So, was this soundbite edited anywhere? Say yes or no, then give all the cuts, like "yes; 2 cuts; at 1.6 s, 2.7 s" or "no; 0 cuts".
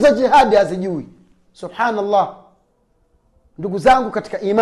no; 0 cuts